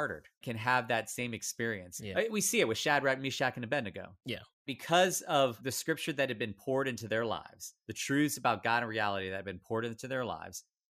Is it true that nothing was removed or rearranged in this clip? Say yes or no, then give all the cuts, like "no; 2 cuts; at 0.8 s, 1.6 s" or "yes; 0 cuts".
yes; 0 cuts